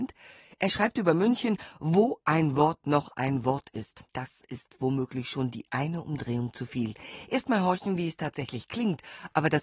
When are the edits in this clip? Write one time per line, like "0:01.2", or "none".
0:04.1